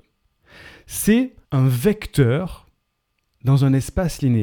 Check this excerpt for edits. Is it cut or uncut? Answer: cut